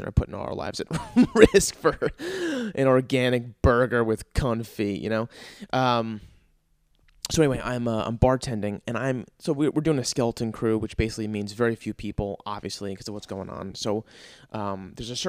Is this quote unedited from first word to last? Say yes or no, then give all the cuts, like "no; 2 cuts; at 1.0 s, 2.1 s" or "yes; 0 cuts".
yes; 0 cuts